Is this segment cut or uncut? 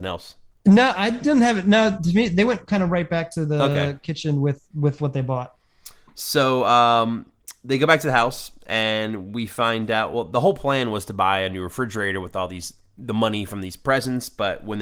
uncut